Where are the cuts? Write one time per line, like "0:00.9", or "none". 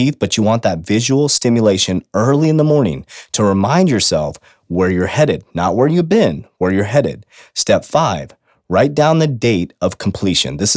none